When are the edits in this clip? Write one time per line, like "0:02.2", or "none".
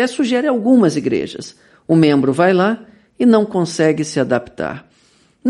none